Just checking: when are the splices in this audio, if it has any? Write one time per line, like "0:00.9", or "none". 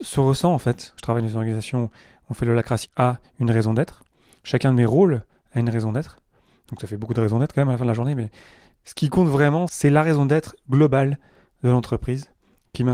0:01.0
0:02.8